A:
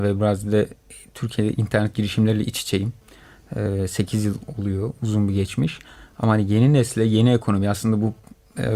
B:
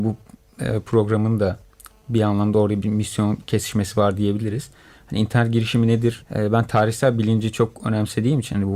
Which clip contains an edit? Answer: B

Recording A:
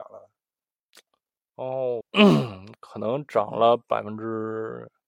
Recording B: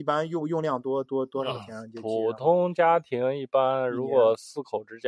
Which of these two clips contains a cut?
A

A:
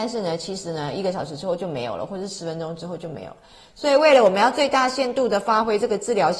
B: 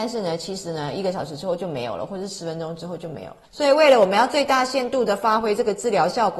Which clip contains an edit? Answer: B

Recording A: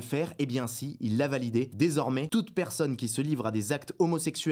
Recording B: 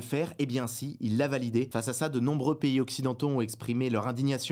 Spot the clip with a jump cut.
A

